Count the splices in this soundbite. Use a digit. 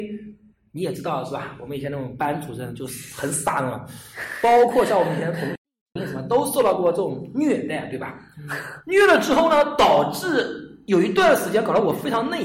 0